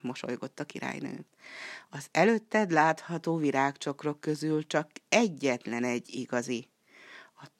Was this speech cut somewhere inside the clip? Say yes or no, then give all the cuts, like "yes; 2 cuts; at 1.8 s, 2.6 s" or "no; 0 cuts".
no; 0 cuts